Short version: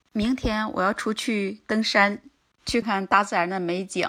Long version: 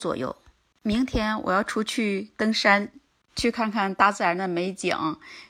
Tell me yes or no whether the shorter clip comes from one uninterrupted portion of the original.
no